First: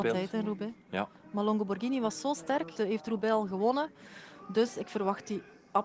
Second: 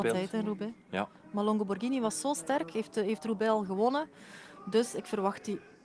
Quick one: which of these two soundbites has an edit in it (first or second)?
first